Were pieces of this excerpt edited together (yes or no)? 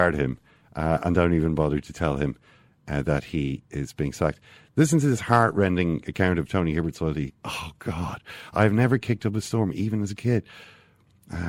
yes